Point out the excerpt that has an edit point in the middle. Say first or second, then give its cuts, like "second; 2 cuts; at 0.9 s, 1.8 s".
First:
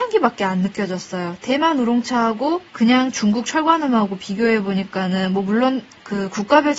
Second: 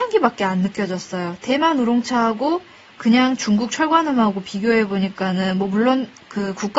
first; 1 cut; at 2.7 s